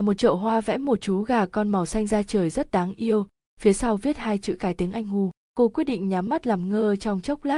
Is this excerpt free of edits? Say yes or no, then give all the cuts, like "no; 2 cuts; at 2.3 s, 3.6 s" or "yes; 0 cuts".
no; 1 cut; at 5.4 s